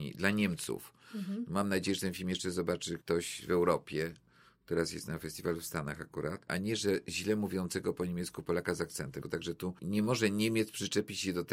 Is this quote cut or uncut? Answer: cut